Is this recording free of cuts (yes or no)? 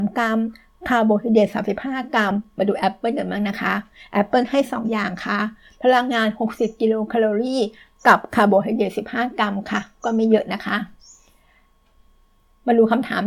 yes